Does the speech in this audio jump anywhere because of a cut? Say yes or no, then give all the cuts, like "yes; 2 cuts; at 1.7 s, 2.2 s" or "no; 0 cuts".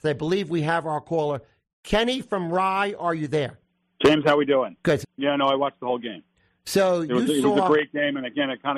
yes; 1 cut; at 5.0 s